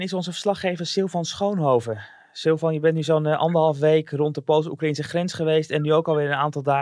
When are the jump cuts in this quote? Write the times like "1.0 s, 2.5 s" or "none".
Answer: none

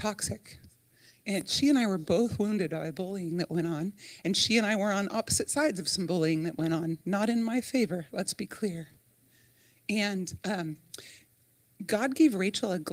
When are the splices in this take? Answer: none

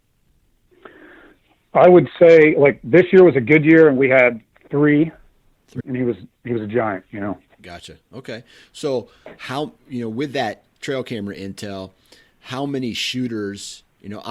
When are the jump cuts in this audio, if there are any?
5.8 s

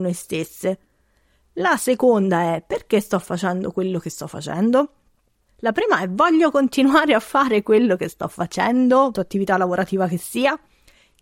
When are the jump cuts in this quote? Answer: 5.5 s, 9.1 s

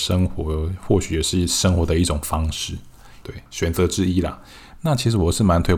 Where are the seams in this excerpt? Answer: 3.2 s, 4.8 s

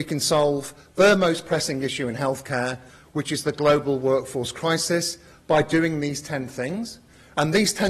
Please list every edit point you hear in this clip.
none

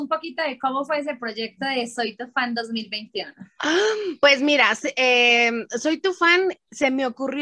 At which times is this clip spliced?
none

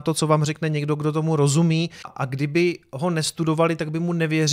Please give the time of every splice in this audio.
2.0 s

